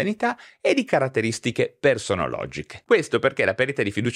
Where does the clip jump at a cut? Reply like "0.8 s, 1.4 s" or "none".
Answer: 2.9 s